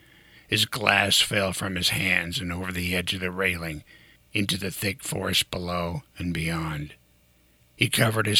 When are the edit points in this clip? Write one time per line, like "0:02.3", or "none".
none